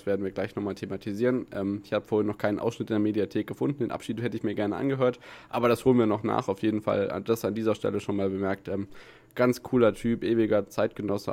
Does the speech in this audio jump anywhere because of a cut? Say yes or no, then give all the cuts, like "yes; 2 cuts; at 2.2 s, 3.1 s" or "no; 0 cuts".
no; 0 cuts